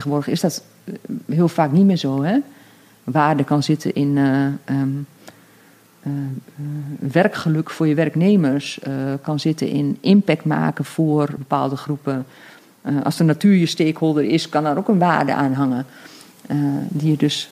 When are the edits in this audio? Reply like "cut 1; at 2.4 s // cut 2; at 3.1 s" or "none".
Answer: cut 1; at 11.4 s

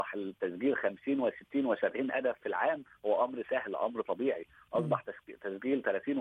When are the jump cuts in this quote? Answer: none

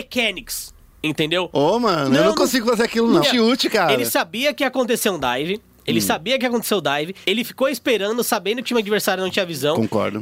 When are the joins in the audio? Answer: cut 1; at 3.2 s // cut 2; at 7.2 s

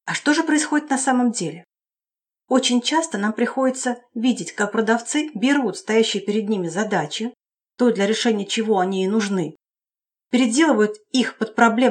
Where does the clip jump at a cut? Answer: none

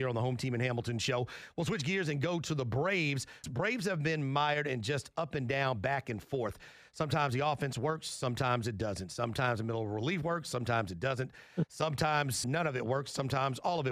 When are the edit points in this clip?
cut 1; at 3.4 s // cut 2; at 12.4 s

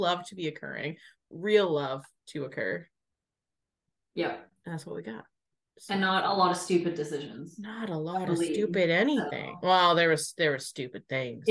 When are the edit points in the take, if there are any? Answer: cut 1; at 1.2 s

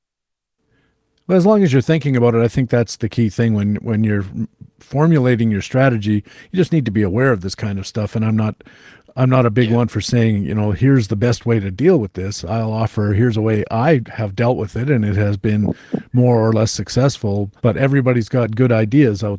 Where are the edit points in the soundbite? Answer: cut 1; at 17.6 s

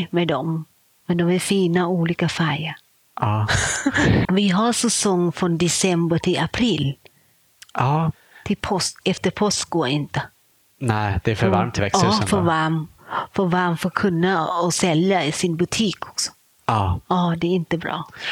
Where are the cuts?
cut 1; at 4.2 s

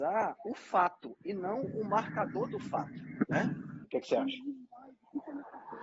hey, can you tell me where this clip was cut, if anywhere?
cut 1; at 3.8 s

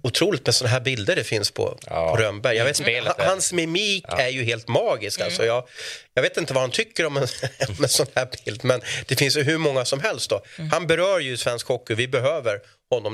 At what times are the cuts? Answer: none

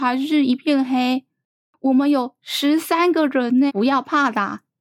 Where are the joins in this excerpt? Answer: cut 1; at 3.7 s

